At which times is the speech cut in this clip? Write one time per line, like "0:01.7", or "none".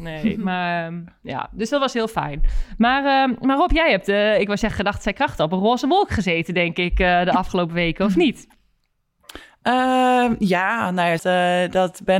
0:11.2